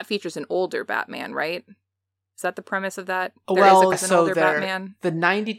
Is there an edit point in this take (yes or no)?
yes